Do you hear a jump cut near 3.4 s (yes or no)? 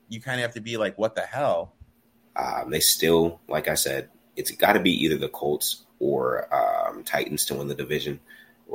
no